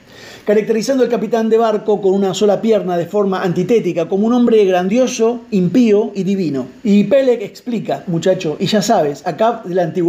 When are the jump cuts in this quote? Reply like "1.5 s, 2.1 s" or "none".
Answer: 6.8 s, 8.1 s